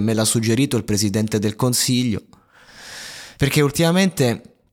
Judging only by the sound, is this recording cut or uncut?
cut